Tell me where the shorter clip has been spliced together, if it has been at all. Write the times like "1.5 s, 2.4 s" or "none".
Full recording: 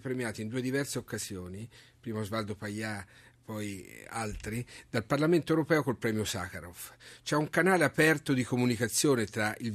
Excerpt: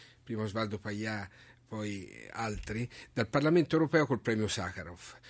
none